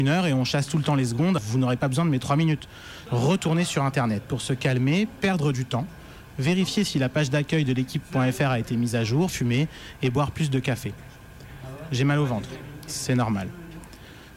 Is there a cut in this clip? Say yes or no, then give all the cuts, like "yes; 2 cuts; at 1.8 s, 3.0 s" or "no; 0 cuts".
yes; 3 cuts; at 1.4 s, 3.1 s, 9.3 s